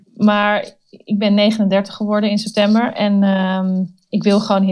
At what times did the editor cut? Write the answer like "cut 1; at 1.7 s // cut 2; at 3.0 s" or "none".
none